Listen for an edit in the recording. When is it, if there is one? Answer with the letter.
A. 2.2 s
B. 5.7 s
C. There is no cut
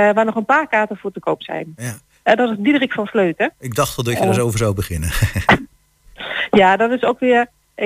A